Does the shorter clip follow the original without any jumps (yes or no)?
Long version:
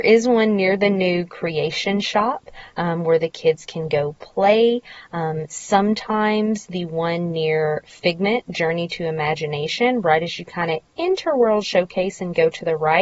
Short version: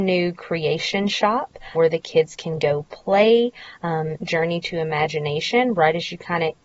no